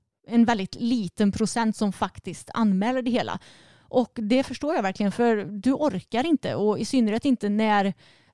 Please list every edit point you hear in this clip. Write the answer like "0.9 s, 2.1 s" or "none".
none